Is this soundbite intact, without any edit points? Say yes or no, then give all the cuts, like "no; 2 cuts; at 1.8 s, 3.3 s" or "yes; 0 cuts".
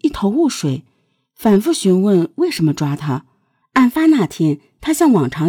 no; 1 cut; at 3.6 s